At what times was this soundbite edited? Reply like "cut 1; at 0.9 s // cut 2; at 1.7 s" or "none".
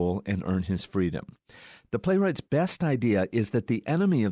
none